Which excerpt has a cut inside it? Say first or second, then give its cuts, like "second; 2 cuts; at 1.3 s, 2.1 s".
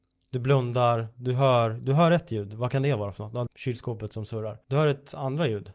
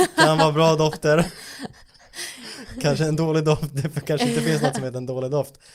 first; 2 cuts; at 3.5 s, 4.6 s